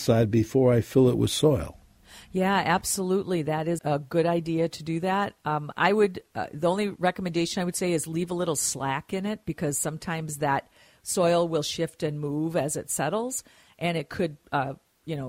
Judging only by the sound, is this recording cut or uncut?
cut